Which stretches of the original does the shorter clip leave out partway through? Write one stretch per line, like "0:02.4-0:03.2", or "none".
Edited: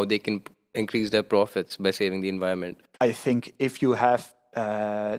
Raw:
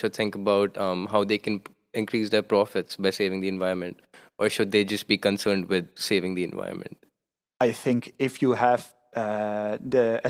0:04.1-0:07.5